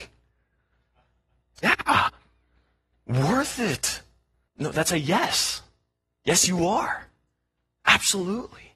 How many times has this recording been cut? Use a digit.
2